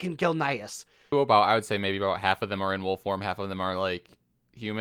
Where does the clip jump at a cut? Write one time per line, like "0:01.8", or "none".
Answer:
0:01.1